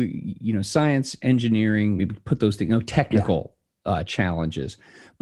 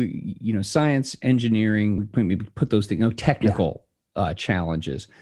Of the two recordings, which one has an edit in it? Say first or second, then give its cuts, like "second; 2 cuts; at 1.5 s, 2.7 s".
first; 1 cut; at 2.0 s